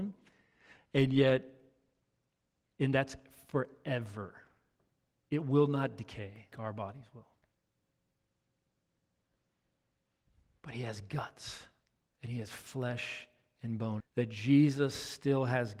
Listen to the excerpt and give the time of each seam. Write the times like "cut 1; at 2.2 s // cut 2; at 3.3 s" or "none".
cut 1; at 6.5 s // cut 2; at 14.0 s